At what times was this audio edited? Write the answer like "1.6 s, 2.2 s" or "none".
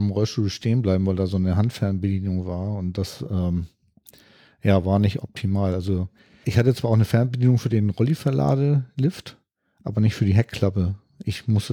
6.4 s